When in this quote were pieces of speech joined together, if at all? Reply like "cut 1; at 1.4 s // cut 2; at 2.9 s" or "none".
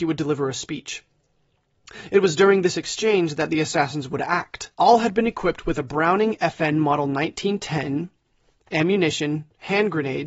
cut 1; at 4.7 s

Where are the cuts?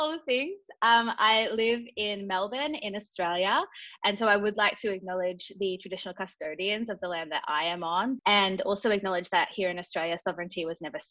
cut 1; at 8.2 s

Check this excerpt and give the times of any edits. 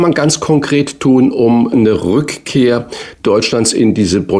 none

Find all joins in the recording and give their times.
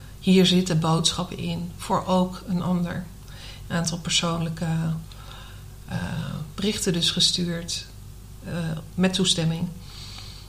none

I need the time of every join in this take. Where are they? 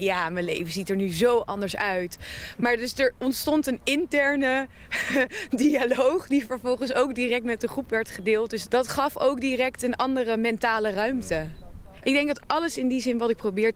cut 1; at 8.6 s

